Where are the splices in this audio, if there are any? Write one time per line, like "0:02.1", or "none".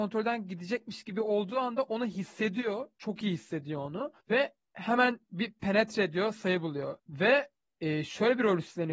0:04.2
0:07.0